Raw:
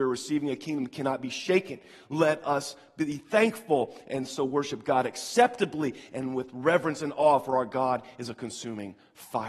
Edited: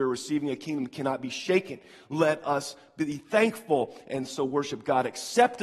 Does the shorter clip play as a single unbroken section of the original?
yes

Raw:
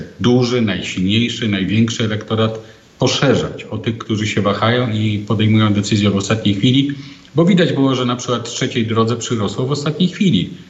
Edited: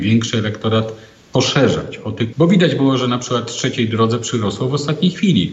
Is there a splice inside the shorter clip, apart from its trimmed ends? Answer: yes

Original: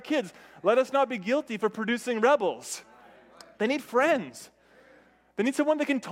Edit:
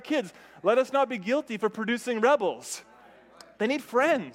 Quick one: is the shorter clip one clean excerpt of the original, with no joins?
yes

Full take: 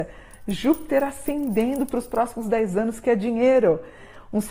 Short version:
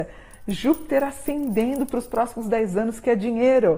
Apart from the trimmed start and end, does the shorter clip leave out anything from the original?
no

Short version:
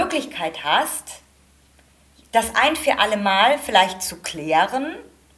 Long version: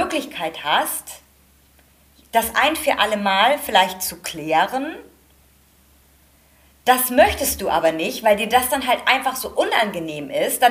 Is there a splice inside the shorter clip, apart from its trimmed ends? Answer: no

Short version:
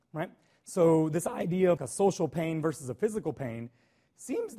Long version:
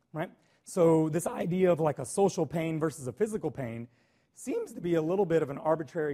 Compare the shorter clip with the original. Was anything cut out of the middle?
yes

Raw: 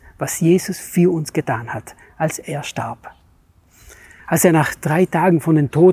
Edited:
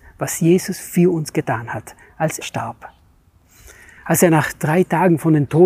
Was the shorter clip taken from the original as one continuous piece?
no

